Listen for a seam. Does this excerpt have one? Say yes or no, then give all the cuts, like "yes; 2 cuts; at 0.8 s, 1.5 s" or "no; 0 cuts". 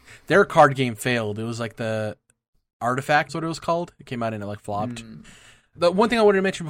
yes; 2 cuts; at 3.3 s, 5.7 s